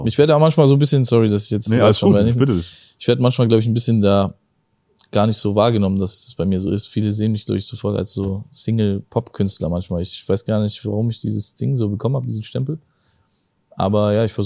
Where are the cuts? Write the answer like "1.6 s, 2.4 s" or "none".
none